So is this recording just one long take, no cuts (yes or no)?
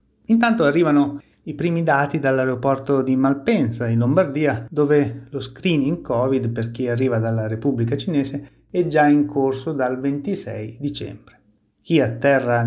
yes